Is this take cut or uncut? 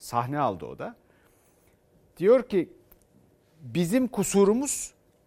uncut